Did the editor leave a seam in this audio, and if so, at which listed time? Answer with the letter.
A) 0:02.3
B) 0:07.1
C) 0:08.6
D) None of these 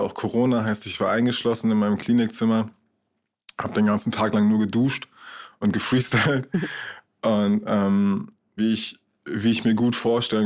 C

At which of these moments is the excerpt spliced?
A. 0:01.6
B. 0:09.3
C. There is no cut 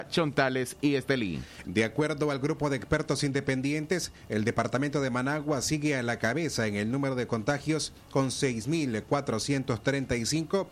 A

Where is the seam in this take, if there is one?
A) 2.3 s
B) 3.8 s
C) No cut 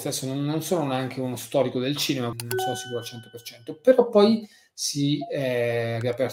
A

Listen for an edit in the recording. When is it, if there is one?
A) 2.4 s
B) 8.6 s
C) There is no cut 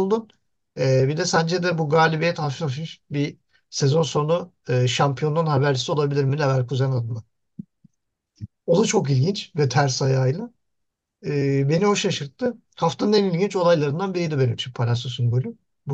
B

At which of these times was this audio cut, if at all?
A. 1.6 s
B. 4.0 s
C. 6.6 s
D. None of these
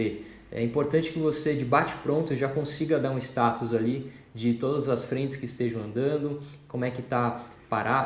D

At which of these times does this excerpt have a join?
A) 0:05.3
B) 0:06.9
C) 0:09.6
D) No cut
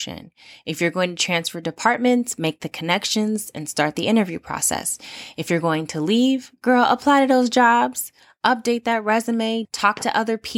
C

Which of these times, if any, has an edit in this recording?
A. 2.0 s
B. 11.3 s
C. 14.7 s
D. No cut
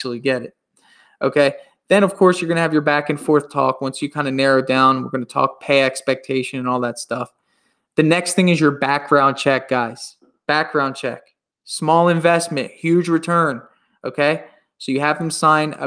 D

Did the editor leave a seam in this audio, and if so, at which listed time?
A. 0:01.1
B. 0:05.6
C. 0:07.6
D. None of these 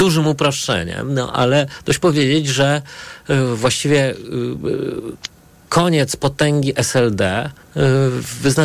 C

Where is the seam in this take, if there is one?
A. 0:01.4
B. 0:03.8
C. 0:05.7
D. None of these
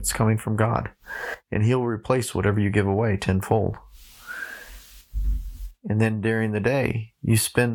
C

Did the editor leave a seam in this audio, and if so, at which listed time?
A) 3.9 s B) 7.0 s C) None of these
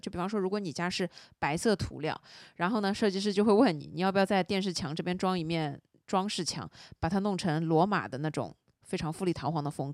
C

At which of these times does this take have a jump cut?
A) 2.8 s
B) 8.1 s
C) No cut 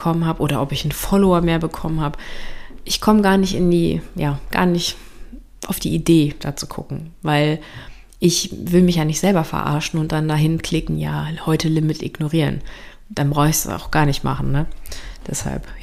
B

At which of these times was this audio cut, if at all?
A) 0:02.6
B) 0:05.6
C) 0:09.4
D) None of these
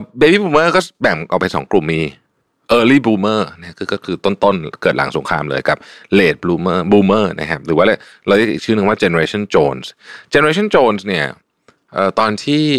A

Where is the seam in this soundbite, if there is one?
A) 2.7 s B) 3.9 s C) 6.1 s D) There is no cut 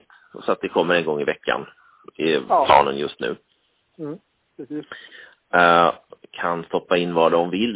C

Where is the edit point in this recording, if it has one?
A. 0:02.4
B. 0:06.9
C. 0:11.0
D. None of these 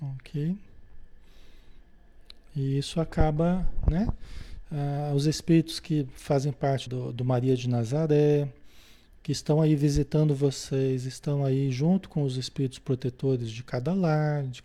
B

